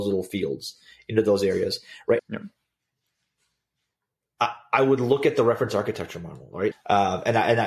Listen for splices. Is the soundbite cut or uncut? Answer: cut